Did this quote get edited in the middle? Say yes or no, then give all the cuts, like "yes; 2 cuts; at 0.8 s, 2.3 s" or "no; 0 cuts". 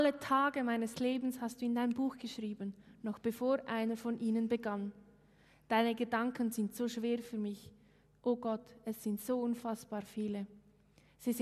no; 0 cuts